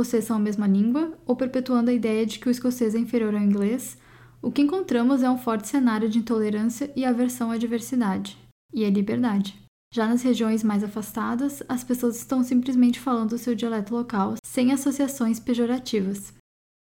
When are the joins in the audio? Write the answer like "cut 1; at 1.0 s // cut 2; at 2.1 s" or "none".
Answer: cut 1; at 9.8 s